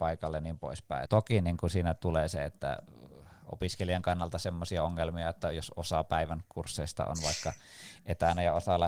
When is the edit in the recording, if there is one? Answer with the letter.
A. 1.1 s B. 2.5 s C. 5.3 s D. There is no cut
A